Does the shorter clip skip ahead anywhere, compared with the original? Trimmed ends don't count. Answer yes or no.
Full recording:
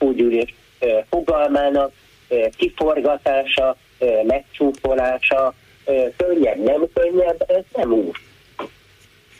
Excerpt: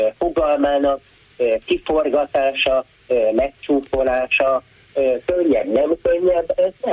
no